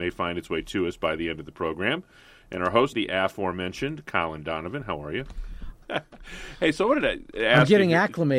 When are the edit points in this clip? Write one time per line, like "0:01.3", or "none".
0:02.9
0:05.8